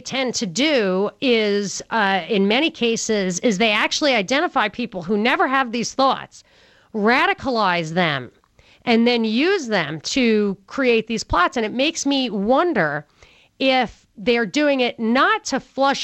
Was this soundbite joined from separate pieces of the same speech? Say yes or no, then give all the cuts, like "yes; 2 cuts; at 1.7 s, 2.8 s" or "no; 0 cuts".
no; 0 cuts